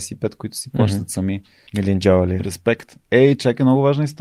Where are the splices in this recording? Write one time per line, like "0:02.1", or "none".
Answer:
0:01.7